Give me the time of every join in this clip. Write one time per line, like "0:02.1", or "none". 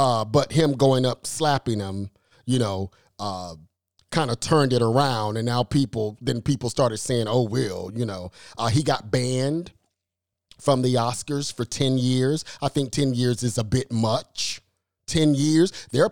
none